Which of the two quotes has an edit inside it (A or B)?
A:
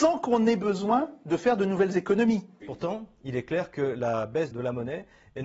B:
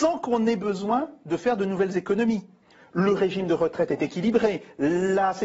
A